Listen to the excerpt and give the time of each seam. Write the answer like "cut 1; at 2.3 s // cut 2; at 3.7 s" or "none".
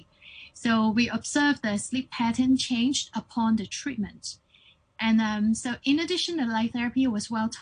none